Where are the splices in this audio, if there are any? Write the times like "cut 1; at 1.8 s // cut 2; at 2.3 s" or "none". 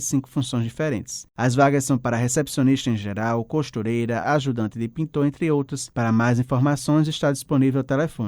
cut 1; at 4.2 s // cut 2; at 5.9 s